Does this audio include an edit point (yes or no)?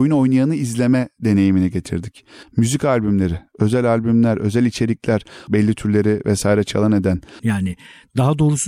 yes